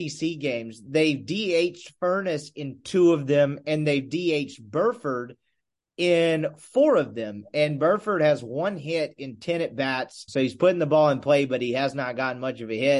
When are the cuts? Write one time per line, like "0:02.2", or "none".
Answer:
0:10.3